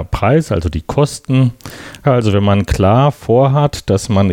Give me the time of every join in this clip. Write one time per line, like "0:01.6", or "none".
0:02.0